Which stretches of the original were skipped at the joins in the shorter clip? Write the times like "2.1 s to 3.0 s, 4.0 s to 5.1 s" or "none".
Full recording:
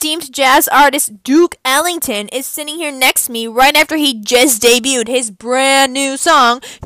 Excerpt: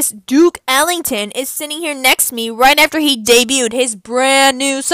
4.2 s to 4.6 s